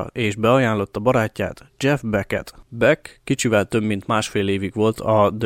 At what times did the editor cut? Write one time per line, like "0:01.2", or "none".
none